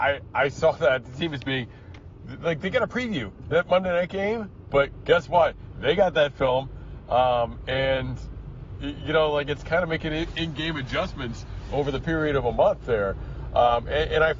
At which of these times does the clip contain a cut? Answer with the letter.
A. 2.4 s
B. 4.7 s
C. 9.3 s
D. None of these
B